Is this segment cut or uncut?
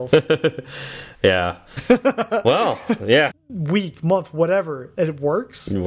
cut